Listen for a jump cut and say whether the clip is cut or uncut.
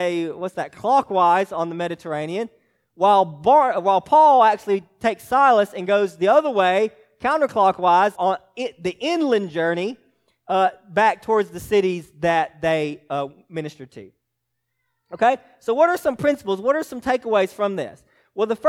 cut